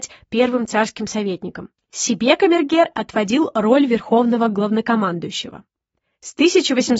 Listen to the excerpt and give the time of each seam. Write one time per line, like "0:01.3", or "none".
none